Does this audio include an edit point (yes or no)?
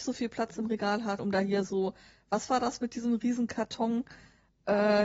yes